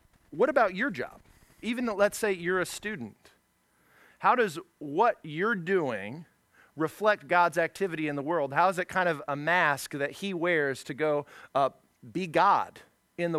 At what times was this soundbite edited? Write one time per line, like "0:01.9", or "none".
0:01.6